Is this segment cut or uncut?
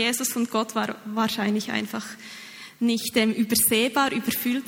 uncut